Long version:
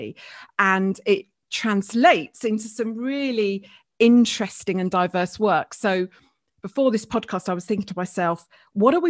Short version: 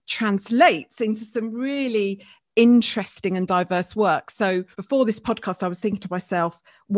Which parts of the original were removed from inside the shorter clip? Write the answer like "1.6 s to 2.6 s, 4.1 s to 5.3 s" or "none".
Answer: 6.2 s to 6.6 s